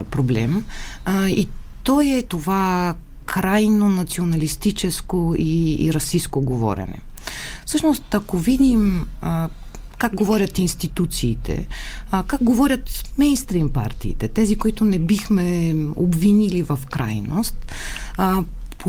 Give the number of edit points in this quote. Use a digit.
1